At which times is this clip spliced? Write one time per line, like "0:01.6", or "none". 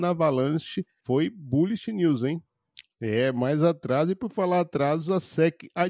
0:02.8